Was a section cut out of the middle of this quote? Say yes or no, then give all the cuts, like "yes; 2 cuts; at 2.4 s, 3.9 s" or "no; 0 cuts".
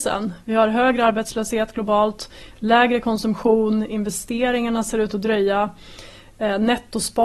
no; 0 cuts